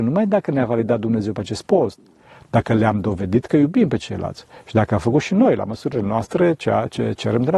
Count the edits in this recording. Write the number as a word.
zero